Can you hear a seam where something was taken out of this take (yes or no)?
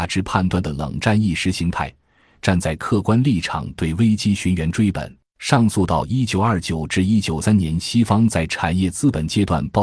yes